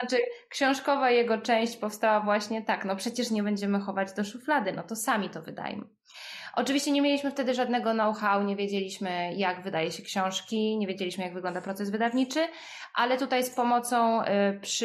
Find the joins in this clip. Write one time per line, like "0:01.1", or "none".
none